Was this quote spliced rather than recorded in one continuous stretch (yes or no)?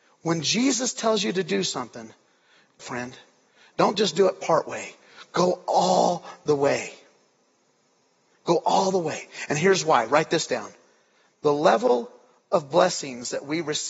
yes